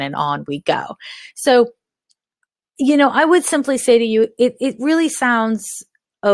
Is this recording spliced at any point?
no; 0 cuts

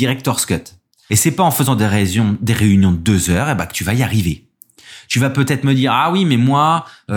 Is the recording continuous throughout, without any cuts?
no; 1 cut; at 1.1 s

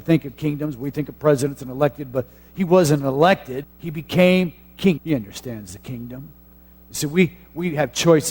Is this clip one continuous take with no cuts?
no; 2 cuts; at 3.6 s, 5.0 s

